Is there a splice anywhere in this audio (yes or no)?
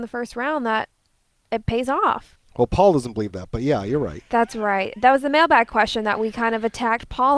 no